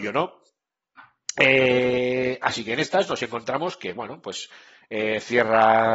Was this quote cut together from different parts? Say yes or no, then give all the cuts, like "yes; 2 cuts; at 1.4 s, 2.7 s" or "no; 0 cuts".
no; 0 cuts